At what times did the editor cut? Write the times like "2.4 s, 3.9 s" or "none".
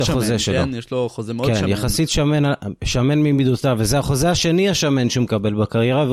none